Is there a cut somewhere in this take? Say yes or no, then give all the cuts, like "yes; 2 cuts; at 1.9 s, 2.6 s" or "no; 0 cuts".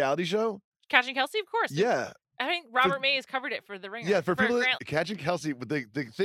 yes; 1 cut; at 4.8 s